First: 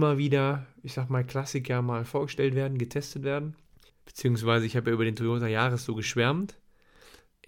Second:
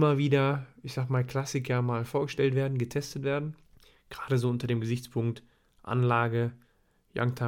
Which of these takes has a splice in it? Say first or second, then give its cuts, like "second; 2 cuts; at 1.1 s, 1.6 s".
first; 1 cut; at 3.9 s